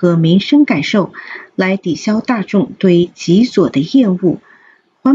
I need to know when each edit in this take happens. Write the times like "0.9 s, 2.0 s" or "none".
none